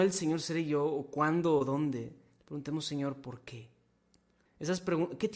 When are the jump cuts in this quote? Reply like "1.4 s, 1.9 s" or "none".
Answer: 4.5 s